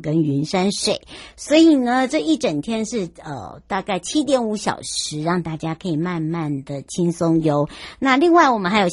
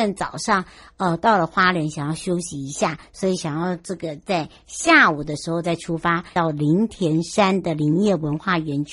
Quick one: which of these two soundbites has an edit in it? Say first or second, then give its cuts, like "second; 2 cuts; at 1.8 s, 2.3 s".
second; 1 cut; at 6.4 s